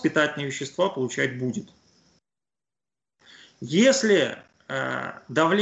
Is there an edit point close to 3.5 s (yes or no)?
no